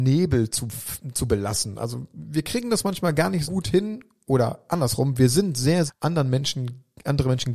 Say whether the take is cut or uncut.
cut